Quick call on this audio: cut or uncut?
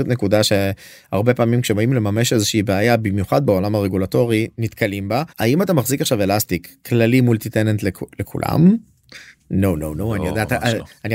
cut